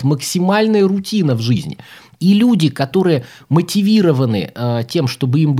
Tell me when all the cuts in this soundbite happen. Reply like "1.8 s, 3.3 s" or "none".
2.2 s